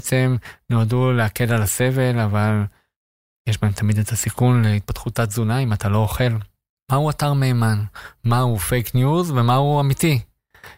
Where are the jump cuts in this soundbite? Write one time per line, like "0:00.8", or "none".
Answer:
0:06.7
0:08.2